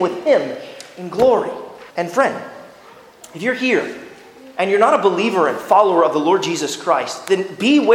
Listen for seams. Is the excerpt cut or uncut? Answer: cut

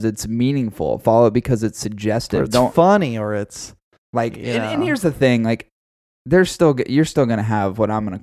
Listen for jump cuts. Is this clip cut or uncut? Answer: uncut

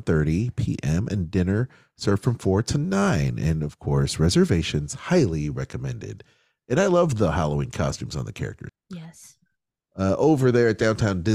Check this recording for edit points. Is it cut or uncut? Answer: cut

